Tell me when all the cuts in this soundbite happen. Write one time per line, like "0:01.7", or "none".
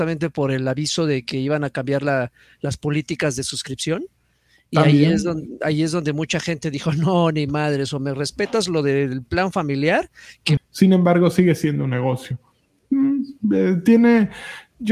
0:10.6